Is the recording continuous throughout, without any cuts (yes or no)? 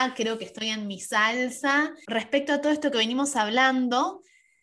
no